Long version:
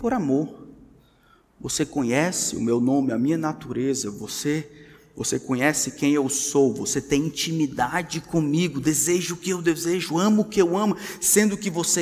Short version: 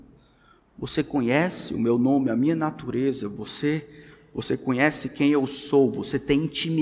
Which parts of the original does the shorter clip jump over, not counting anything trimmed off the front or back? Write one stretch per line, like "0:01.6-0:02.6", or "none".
none